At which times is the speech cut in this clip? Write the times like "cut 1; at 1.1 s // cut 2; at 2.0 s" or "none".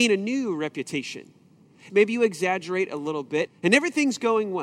cut 1; at 1.9 s // cut 2; at 3.5 s